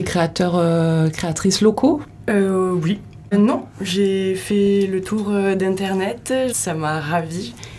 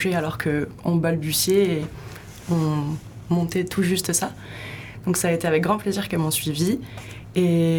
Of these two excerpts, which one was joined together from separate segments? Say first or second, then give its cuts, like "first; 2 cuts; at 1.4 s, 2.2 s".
first; 2 cuts; at 3.3 s, 6.5 s